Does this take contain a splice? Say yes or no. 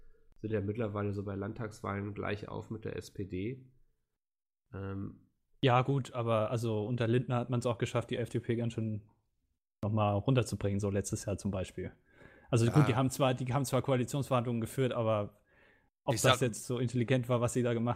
no